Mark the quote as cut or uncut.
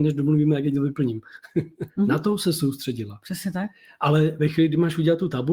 cut